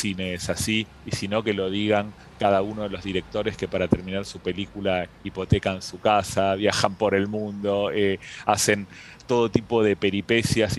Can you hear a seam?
no; 0 cuts

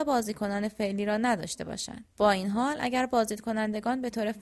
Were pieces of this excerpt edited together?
yes; 1 cut; at 2.1 s

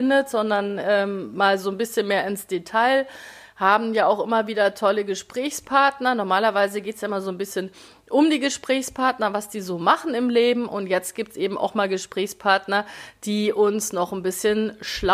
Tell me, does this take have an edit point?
no; 0 cuts

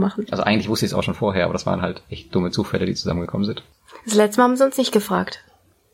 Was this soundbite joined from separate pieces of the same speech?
no; 0 cuts

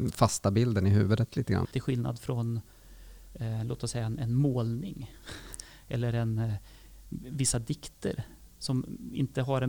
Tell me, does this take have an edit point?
yes; 1 cut; at 1.6 s

